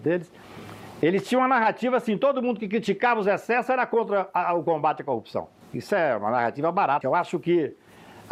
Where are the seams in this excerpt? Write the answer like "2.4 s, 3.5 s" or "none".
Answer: 5.6 s, 7.0 s